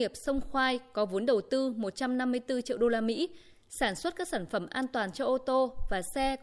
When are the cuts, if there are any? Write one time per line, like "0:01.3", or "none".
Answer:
none